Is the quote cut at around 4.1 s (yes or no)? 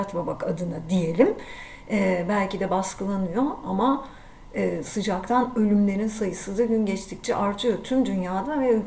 no